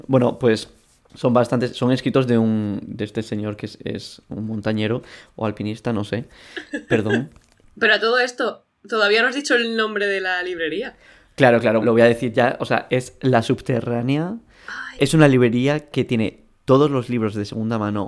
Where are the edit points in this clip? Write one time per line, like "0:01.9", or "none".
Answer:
0:08.8
0:11.8
0:15.0